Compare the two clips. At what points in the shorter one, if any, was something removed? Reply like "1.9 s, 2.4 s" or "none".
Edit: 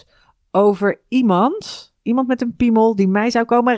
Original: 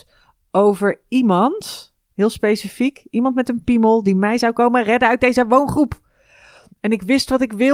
2.0 s